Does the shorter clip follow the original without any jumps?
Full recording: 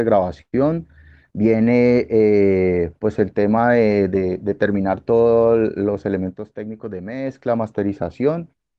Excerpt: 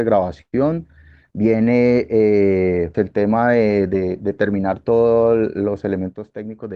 no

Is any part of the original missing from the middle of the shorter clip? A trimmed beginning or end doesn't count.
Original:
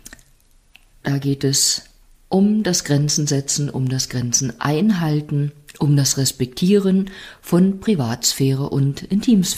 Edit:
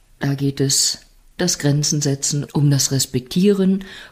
yes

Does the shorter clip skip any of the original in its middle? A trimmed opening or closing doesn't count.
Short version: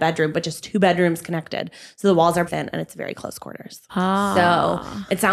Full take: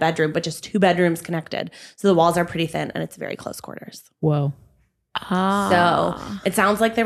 yes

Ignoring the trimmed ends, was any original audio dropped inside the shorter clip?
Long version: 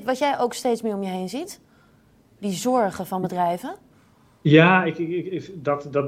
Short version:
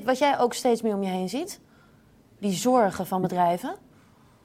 no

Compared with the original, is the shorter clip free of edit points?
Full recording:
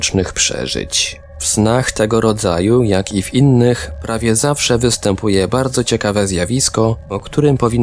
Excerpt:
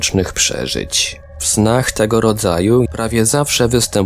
no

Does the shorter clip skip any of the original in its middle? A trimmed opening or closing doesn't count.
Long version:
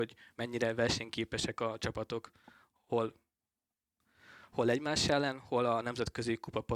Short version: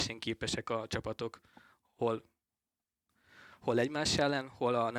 no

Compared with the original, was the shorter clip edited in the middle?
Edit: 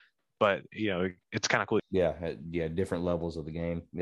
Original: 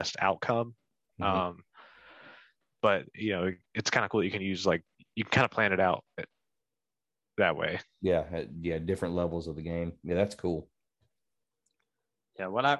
yes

